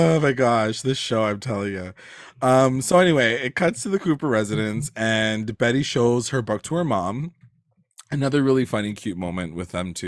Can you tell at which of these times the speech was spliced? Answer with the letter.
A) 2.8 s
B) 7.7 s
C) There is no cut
C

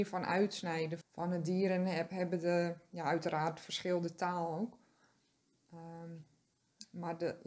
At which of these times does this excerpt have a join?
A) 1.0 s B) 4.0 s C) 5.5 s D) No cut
A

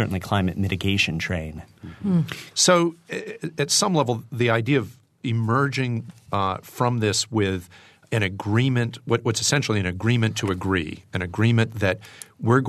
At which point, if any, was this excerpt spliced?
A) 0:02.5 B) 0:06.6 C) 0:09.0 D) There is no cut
A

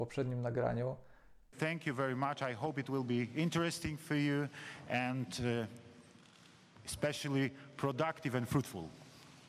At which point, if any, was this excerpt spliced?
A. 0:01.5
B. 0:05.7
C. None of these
A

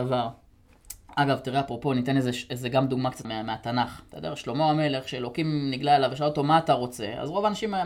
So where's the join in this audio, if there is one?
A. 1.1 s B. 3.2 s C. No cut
B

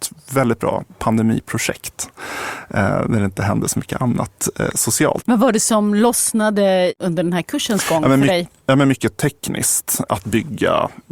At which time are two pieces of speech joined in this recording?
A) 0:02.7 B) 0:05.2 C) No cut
B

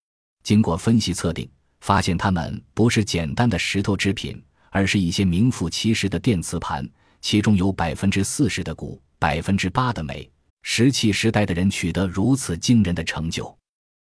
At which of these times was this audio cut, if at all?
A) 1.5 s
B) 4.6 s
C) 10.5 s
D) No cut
C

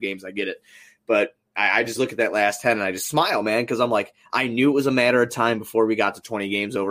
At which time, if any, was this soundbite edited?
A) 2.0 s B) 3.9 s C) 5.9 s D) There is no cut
A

